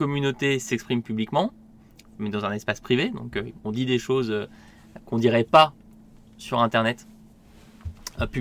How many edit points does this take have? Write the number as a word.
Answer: two